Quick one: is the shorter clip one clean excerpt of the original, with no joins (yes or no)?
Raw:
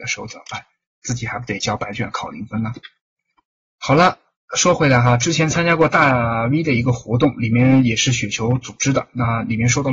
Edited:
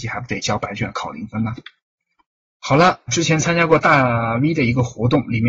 no